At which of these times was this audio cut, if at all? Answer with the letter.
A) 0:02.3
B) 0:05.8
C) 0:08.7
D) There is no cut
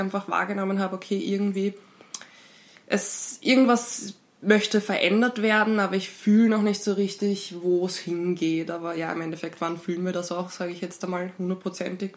D